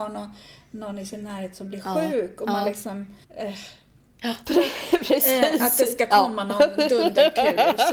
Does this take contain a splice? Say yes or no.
yes